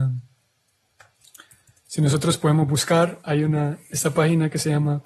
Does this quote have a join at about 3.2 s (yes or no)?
yes